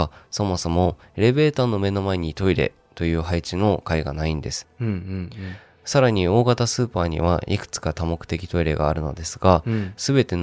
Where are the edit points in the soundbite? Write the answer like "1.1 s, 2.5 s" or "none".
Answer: 4.6 s